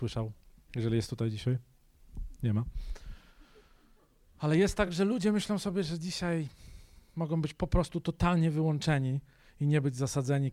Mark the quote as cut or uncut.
uncut